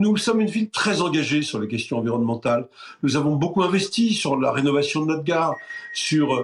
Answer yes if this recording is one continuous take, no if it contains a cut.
yes